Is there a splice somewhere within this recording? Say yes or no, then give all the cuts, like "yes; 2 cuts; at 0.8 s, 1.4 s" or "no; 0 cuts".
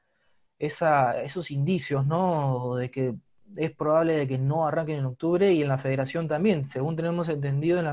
no; 0 cuts